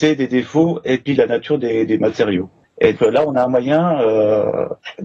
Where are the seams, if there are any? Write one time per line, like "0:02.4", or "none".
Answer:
0:03.0